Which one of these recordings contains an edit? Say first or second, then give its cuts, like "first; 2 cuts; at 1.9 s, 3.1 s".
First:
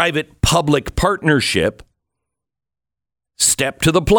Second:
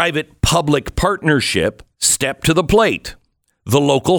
second; 1 cut; at 1.9 s